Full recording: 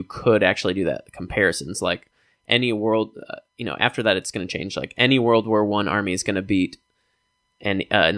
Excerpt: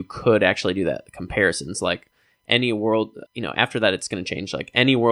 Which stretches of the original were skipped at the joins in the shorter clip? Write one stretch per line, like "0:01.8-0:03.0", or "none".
0:03.2-0:03.5